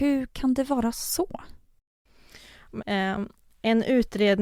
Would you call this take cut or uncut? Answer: cut